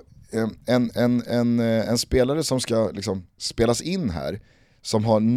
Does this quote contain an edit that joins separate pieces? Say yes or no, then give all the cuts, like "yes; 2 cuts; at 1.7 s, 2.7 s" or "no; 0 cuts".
no; 0 cuts